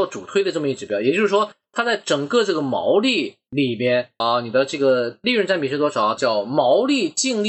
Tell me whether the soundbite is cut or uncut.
cut